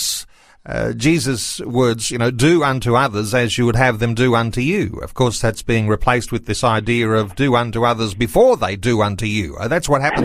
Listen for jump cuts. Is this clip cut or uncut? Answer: uncut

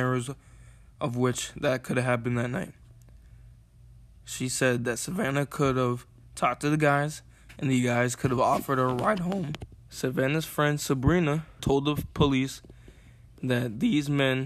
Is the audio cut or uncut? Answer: cut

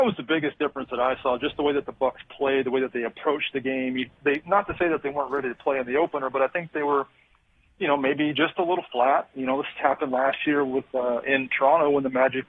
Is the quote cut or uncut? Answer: uncut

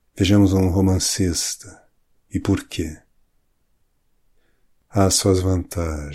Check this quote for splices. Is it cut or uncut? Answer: cut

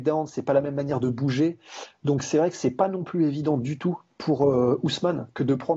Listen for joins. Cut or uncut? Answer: uncut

